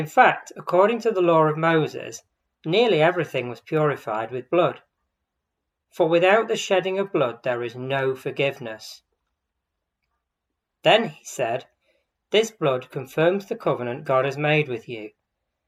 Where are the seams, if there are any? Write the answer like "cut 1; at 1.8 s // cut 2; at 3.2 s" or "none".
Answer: cut 1; at 10.7 s